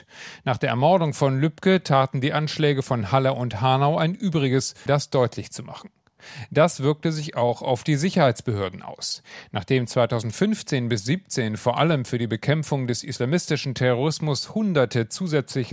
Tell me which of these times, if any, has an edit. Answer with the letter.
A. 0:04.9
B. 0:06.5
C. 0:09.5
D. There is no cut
A